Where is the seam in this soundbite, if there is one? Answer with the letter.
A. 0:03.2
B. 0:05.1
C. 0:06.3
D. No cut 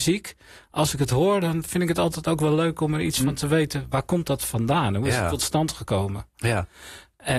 D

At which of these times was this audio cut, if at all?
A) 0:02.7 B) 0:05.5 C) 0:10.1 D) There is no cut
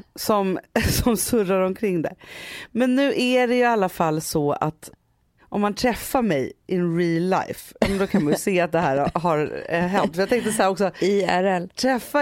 D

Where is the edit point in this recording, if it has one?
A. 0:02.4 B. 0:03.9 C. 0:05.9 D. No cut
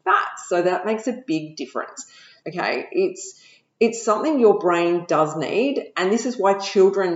A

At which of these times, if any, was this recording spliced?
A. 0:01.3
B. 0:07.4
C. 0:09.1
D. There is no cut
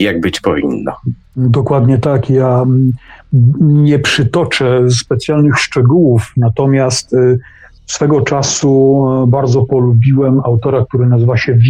D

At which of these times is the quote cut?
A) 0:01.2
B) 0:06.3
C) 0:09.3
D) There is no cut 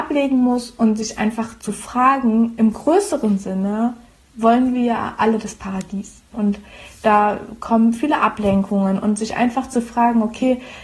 B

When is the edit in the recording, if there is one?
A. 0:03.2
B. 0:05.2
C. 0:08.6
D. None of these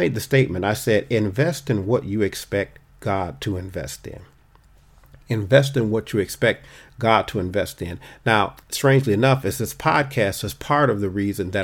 C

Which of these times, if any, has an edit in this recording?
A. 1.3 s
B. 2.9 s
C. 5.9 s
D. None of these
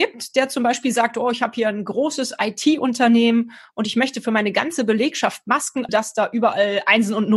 C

